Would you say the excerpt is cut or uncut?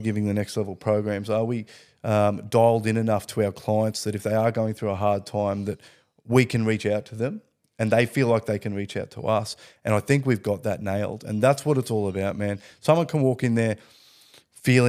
uncut